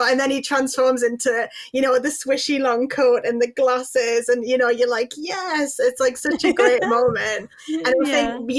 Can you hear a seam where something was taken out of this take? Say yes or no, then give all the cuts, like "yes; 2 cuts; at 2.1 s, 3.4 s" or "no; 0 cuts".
no; 0 cuts